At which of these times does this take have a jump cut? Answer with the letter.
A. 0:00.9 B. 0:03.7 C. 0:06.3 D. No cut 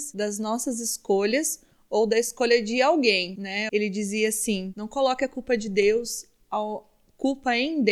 B